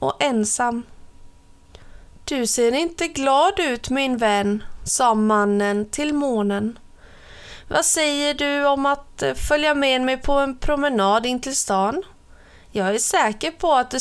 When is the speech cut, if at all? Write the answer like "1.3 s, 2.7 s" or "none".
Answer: none